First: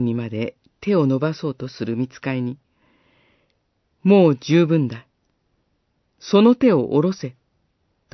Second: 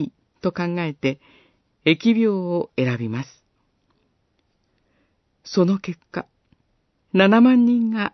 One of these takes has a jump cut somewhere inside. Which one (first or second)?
second